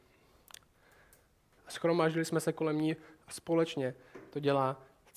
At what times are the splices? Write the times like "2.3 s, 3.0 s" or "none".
1.6 s